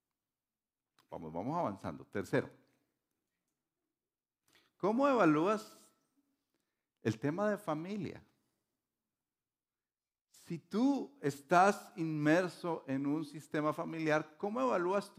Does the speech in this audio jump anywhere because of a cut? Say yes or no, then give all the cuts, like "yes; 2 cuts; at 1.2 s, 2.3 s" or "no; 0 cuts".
no; 0 cuts